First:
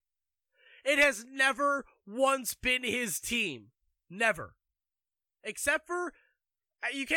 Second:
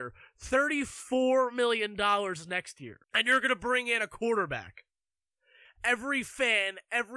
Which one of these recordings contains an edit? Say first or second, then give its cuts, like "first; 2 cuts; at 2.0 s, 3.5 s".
second; 2 cuts; at 3.0 s, 5.6 s